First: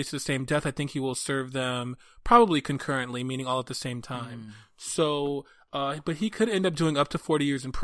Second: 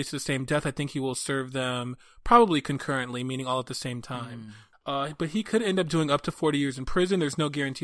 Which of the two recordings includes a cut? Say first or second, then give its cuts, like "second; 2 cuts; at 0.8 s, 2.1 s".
second; 1 cut; at 4.7 s